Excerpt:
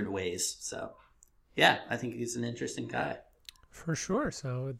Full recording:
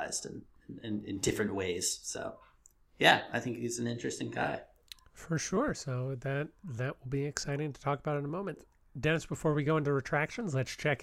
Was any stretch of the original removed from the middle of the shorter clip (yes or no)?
no